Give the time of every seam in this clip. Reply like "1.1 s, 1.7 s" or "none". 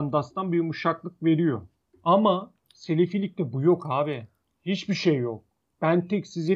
none